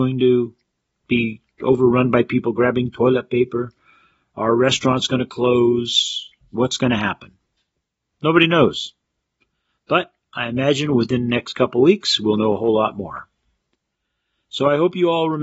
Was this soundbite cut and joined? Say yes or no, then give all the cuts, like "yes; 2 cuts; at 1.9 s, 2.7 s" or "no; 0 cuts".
no; 0 cuts